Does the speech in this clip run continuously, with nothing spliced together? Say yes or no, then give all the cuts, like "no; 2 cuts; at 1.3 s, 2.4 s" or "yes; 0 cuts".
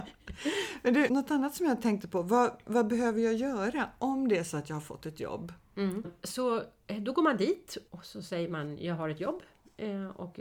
no; 3 cuts; at 1.1 s, 6.0 s, 7.9 s